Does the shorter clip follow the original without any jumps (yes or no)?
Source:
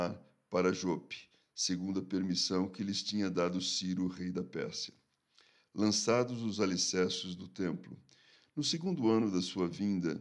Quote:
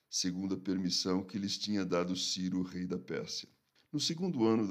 no